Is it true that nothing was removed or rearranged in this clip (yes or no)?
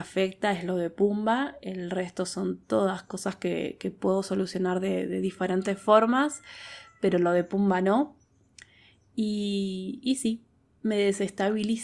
yes